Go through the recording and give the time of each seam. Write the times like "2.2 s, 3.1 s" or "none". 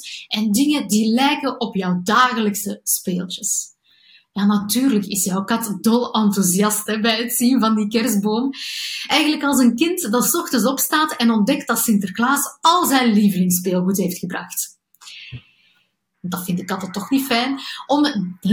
16.1 s